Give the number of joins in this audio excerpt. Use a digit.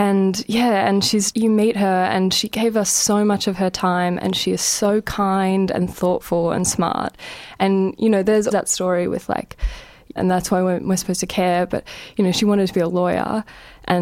3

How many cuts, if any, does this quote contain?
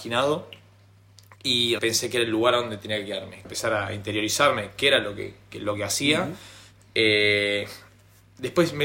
2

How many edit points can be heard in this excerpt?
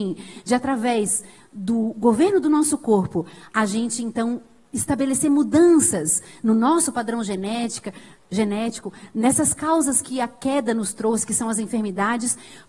0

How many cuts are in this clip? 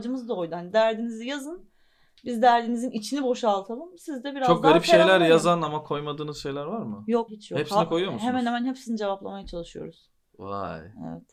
1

